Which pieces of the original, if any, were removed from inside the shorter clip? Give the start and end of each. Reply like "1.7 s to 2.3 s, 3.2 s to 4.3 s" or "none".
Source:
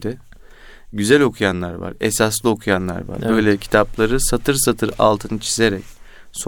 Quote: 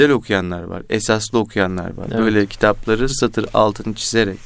4.2 s to 4.5 s